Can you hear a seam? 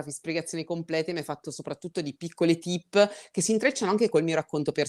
no; 0 cuts

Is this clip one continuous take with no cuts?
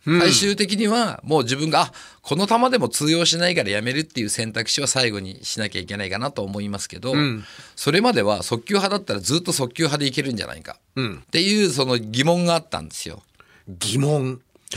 no; 1 cut; at 11.2 s

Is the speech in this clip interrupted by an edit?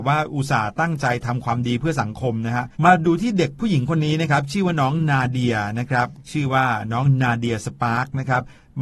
yes; 1 cut; at 2.7 s

